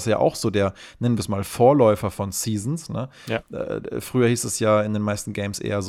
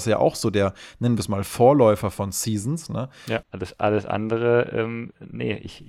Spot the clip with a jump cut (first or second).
second